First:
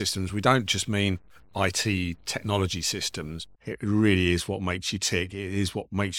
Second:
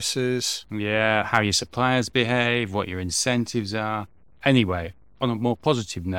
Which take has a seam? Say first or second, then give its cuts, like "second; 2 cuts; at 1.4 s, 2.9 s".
first; 1 cut; at 3.5 s